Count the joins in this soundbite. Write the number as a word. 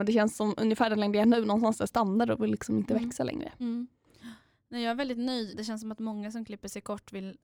one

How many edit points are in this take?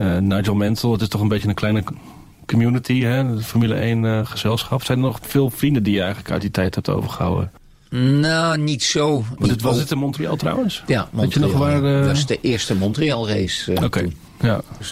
two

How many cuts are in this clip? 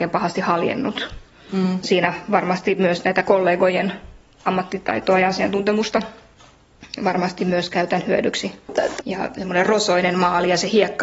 two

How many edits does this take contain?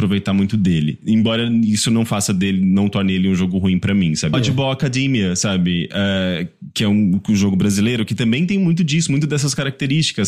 one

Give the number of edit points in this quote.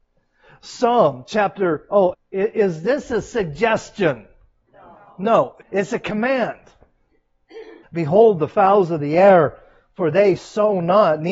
three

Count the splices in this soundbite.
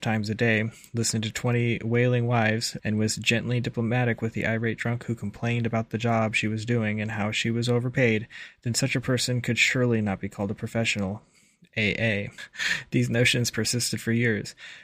two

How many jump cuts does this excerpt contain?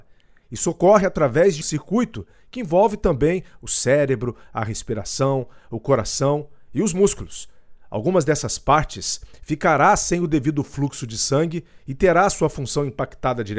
one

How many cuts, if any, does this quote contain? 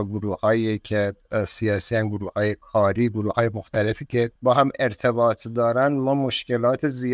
one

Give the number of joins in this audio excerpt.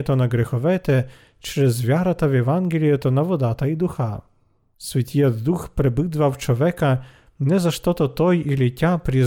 one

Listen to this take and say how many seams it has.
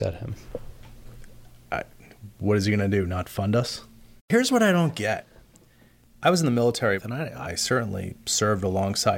one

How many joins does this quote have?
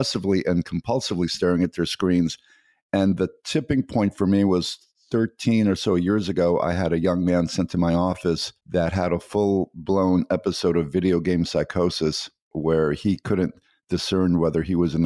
one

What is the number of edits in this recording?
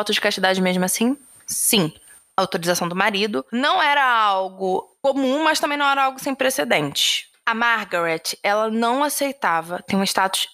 one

